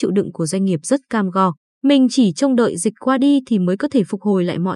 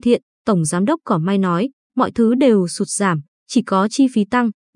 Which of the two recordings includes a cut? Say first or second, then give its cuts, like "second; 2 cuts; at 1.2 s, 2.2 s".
first; 1 cut; at 1.7 s